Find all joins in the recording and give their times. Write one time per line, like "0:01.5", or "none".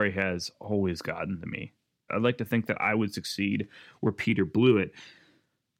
0:02.1